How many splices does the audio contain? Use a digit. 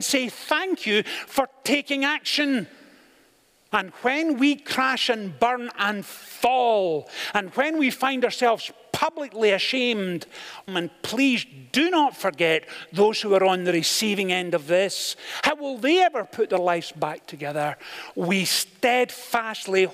2